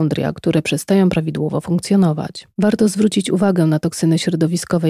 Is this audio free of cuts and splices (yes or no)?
yes